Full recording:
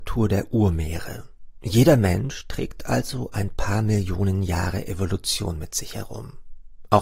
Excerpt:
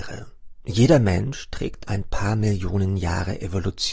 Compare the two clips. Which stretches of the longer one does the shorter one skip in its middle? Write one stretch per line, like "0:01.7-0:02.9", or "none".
0:02.8-0:03.3